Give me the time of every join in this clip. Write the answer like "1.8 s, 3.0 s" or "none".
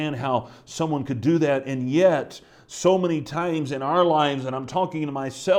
none